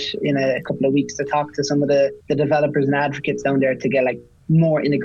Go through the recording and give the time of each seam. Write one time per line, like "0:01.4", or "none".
0:02.2